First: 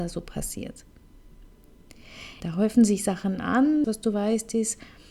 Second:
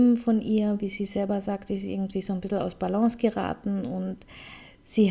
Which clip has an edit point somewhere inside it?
first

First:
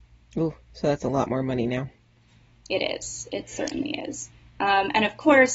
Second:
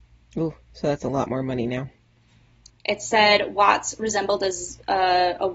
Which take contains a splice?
second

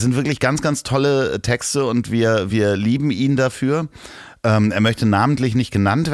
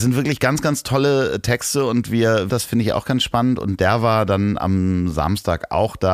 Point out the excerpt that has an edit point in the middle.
second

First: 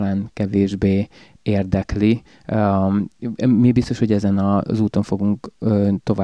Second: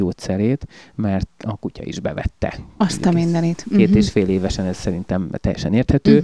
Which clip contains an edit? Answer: second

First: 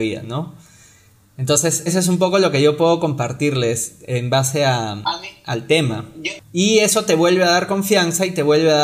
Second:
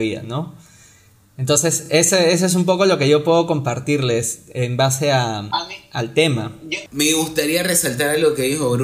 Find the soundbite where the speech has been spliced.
first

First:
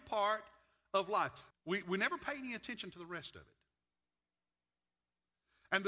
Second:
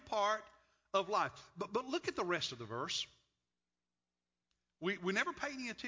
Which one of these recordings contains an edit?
first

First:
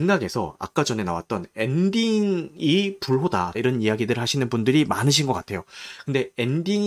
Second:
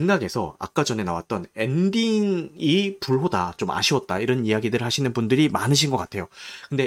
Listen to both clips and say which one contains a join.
first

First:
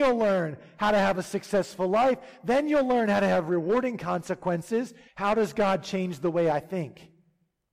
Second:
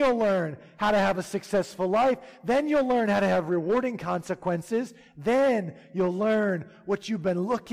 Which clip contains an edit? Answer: first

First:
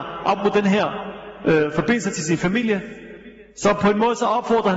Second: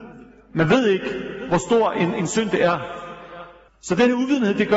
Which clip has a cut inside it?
second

